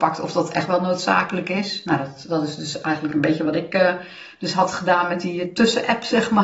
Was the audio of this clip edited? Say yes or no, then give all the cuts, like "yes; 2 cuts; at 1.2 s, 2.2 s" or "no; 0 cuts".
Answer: no; 0 cuts